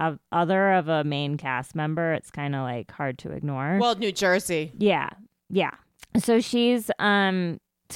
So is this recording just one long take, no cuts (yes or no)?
yes